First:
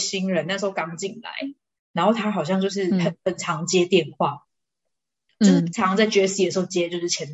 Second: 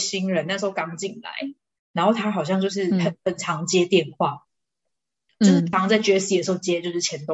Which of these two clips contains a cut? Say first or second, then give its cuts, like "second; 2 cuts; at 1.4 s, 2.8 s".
second; 1 cut; at 5.7 s